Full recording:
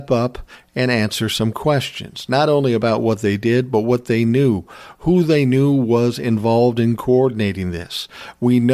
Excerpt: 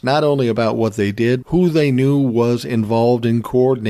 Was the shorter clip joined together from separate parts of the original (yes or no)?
yes